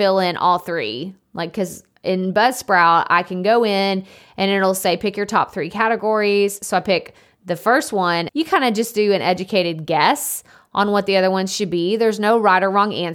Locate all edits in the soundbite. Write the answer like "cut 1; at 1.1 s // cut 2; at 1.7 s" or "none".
cut 1; at 8.3 s